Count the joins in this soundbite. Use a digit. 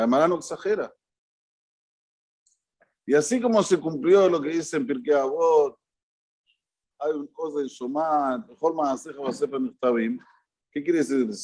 1